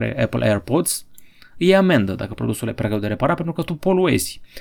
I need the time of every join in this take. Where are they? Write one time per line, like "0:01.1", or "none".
none